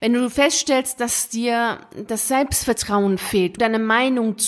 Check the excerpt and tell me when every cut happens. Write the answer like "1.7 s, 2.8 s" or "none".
3.6 s